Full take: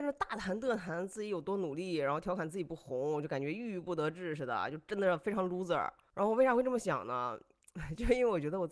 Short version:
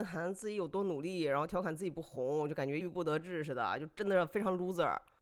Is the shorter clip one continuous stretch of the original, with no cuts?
no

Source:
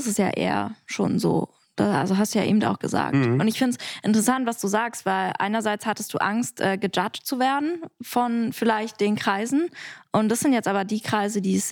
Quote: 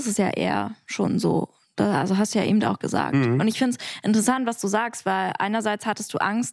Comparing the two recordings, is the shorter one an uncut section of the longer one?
yes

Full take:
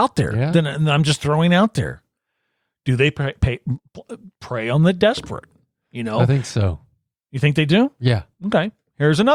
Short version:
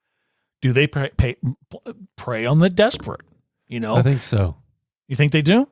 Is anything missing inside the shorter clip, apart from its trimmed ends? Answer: no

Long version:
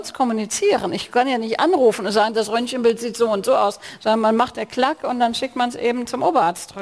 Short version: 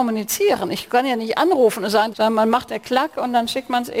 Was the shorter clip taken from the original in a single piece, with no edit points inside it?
no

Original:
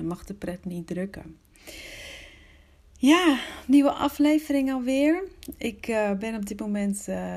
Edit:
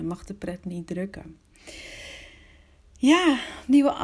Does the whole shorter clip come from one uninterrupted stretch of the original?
yes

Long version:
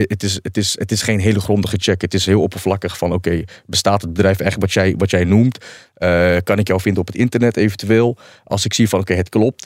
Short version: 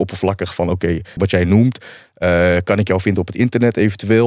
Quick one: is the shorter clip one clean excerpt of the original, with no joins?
no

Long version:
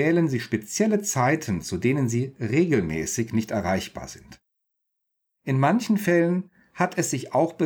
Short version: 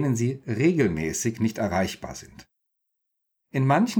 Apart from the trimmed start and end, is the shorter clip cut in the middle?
no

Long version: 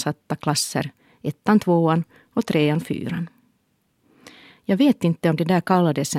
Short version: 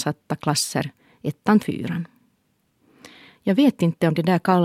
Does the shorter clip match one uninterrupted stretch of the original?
no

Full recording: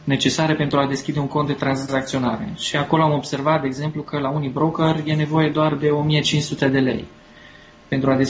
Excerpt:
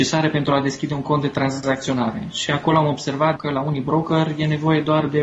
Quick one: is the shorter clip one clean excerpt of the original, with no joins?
no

